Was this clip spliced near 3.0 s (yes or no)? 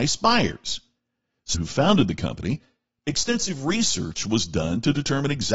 no